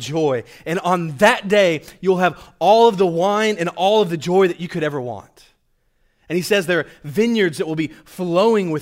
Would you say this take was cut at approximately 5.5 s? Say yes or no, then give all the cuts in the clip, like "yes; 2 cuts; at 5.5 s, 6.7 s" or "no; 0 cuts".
no; 0 cuts